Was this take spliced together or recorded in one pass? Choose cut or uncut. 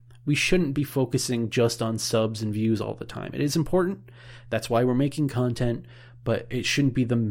uncut